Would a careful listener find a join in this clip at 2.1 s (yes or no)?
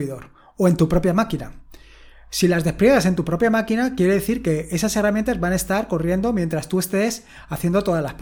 no